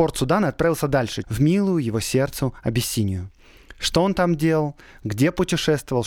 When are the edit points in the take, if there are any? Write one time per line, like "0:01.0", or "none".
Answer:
0:01.2